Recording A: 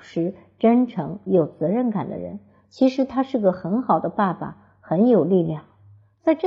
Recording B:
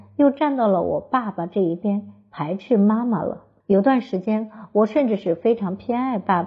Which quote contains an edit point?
B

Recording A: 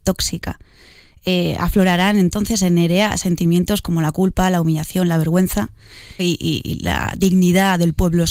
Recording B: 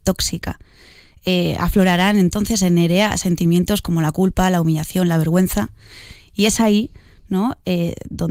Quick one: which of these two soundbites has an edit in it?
A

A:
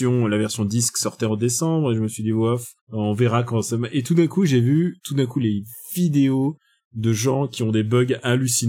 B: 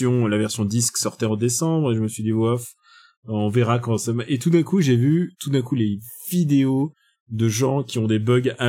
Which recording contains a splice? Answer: A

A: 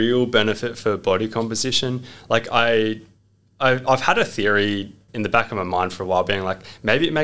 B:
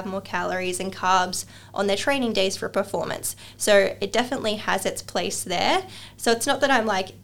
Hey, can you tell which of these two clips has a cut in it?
A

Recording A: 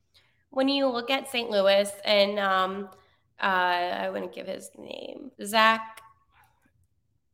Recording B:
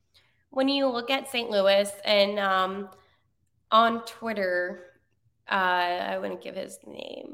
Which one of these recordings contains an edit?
A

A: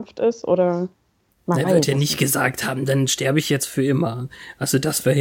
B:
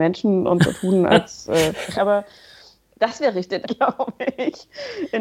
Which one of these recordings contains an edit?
B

